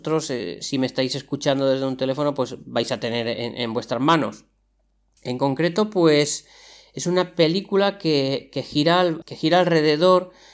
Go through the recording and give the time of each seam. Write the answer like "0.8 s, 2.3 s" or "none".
5.2 s, 9.2 s